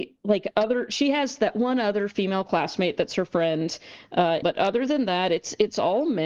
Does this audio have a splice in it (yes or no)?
yes